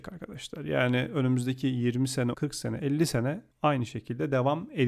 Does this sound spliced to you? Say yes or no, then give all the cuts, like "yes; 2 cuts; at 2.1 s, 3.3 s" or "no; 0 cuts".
yes; 2 cuts; at 2.3 s, 3.5 s